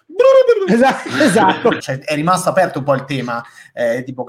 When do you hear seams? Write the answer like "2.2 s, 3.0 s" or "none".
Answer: 1.8 s